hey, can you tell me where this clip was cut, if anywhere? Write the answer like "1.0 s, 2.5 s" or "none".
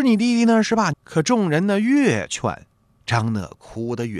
0.9 s